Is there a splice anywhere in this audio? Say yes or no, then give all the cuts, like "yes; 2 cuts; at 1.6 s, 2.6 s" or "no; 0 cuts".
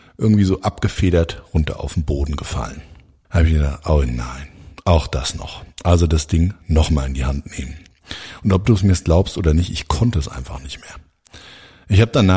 no; 0 cuts